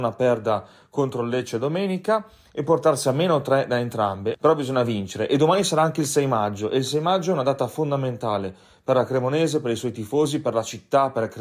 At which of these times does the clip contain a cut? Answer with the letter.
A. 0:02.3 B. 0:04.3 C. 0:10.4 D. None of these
B